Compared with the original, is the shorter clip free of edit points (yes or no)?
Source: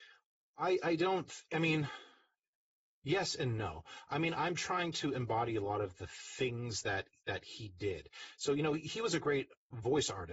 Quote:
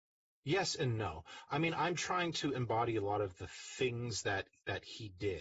yes